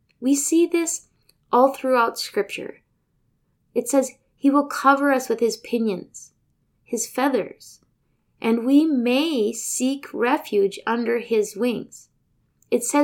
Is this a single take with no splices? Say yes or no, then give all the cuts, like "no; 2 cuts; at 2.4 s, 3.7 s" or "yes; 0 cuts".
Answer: no; 1 cut; at 3.6 s